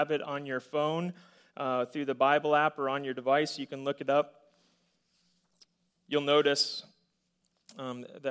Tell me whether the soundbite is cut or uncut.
uncut